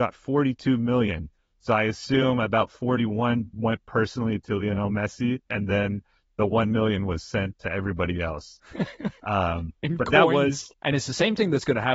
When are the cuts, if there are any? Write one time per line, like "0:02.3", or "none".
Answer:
0:10.7